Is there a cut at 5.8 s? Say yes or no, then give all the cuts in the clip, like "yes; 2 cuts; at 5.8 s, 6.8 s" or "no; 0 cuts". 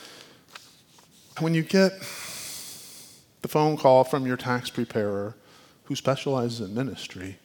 no; 1 cut; at 1.4 s